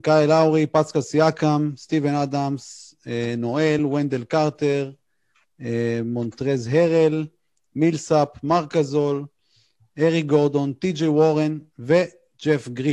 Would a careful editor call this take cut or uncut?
uncut